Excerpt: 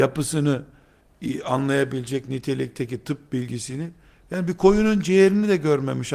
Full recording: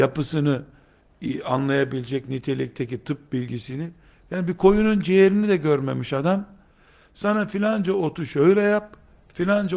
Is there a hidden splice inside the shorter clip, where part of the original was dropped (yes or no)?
no